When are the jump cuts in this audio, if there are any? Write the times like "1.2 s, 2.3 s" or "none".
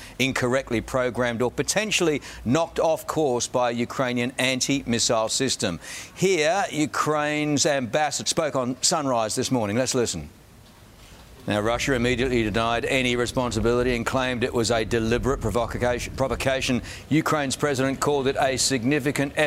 8.2 s, 11.4 s